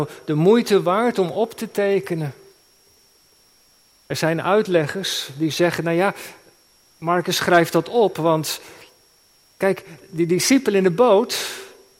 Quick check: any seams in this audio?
no; 0 cuts

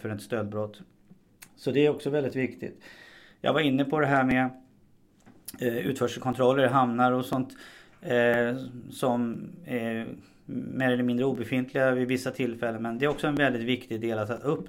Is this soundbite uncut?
yes; 0 cuts

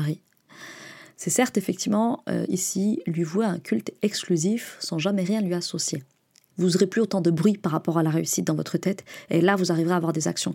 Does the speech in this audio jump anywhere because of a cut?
yes; 1 cut; at 6.5 s

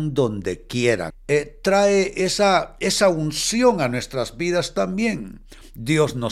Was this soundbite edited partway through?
yes; 1 cut; at 1.1 s

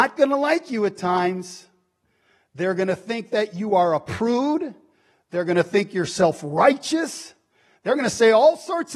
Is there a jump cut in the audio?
no; 0 cuts

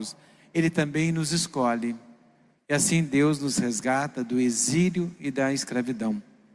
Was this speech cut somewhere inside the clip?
yes; 1 cut; at 2.6 s

